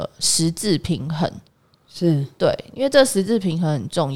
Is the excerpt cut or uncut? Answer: uncut